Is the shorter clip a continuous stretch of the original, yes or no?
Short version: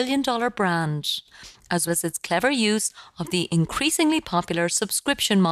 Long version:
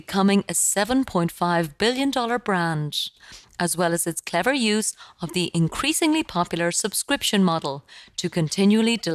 no